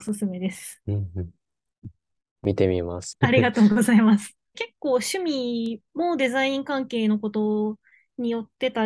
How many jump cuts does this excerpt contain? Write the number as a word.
two